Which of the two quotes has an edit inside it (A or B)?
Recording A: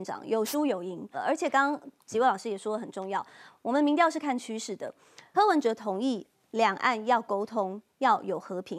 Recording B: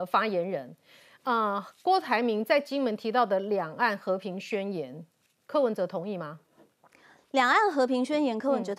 A